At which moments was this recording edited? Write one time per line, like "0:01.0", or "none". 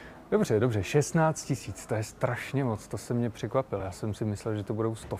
none